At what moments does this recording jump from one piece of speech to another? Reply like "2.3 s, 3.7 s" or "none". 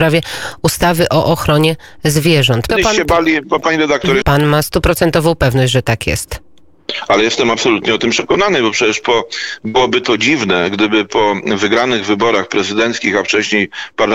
2.7 s, 4.2 s